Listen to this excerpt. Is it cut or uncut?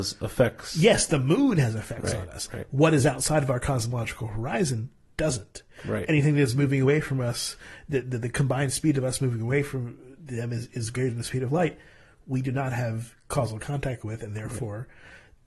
uncut